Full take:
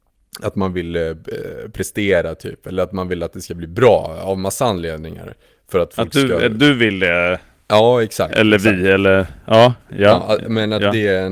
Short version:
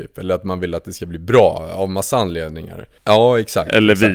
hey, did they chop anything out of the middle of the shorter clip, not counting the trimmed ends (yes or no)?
yes